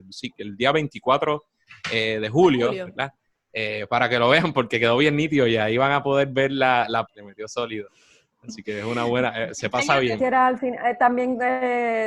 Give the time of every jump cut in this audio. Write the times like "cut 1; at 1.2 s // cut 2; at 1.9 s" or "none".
cut 1; at 7.1 s // cut 2; at 10.2 s